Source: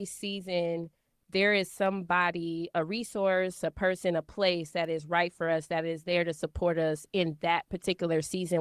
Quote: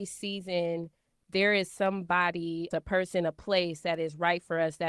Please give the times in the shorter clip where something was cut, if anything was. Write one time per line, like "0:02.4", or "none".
0:02.7